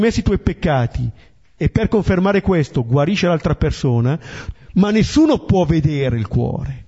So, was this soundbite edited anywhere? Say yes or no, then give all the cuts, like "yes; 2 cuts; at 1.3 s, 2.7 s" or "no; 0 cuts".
yes; 1 cut; at 4.5 s